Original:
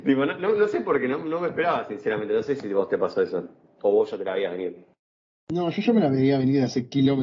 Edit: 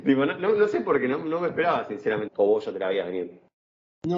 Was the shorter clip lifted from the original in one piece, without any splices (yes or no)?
no